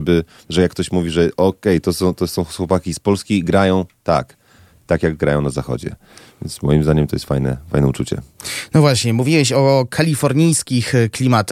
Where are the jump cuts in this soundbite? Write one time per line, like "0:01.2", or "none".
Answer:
none